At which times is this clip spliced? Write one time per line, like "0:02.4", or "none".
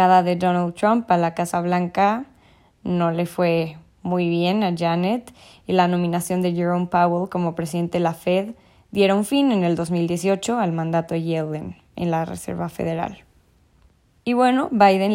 none